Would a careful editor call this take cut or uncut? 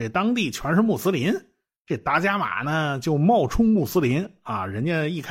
uncut